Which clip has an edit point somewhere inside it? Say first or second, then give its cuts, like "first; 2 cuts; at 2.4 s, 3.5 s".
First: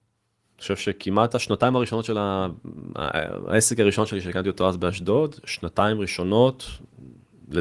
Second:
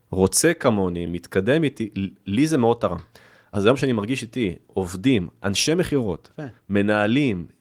second; 1 cut; at 1.1 s